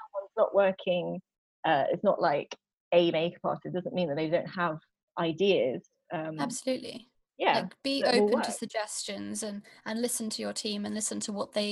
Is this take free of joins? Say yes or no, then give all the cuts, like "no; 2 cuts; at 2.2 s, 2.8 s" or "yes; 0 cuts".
yes; 0 cuts